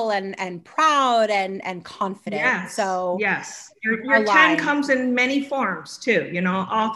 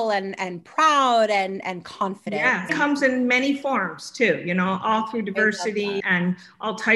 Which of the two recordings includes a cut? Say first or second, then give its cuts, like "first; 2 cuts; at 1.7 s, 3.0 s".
second; 2 cuts; at 2.7 s, 6.0 s